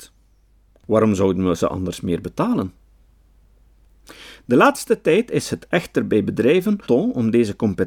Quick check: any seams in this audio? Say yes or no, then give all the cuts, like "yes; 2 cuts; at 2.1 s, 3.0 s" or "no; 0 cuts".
yes; 1 cut; at 6.9 s